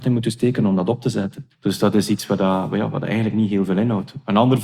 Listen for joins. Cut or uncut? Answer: cut